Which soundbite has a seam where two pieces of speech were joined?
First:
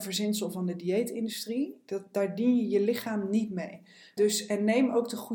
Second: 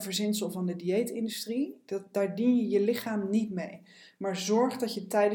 first; 1 cut; at 4.2 s

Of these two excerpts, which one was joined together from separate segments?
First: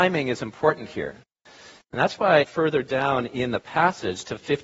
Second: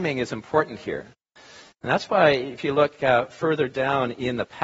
first; 1 cut; at 2.4 s

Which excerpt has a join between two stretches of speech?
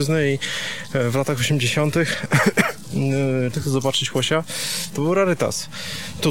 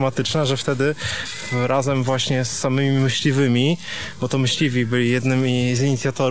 first; 1 cut; at 3.5 s

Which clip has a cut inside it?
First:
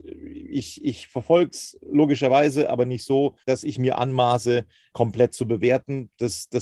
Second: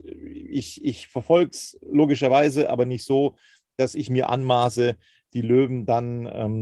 first; 2 cuts; at 3.4 s, 4.9 s

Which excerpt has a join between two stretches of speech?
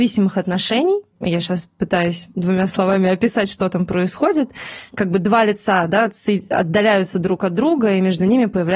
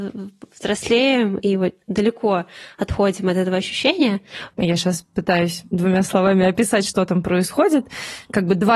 second; 1 cut; at 4.5 s

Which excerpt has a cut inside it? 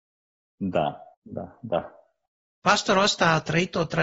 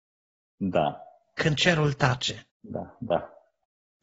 first; 1 cut; at 1.1 s

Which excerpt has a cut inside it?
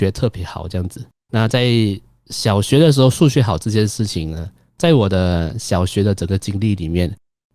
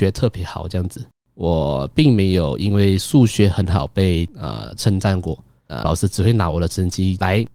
second; 2 cuts; at 1.1 s, 5.8 s

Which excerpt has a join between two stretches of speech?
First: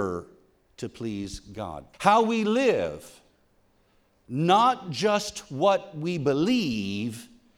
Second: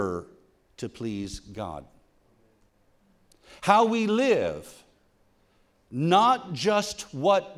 first; 1 cut; at 1.9 s

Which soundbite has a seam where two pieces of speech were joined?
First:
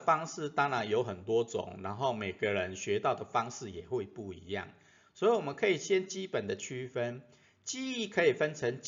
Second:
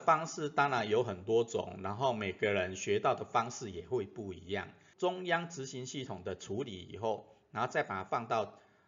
second; 1 cut; at 4.9 s

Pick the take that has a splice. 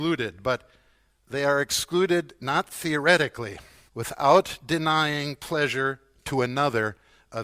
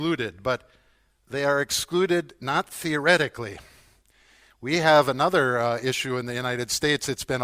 first; 1 cut; at 3.9 s

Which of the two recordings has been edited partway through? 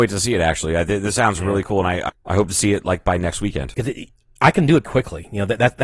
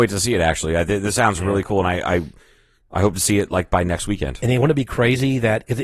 first; 3 cuts; at 2.1 s, 3.7 s, 4.8 s

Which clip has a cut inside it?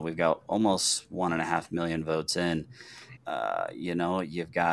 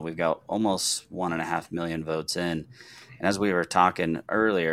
first; 1 cut; at 3.2 s

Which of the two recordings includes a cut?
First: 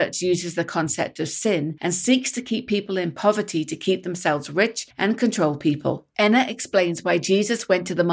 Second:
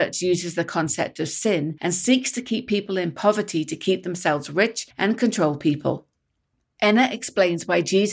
first; 1 cut; at 6.1 s

